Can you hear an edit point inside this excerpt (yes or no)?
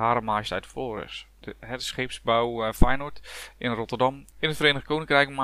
yes